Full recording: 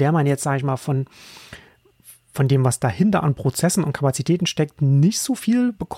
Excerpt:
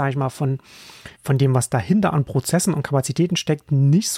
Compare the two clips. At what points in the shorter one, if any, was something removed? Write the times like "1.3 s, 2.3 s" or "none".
1.1 s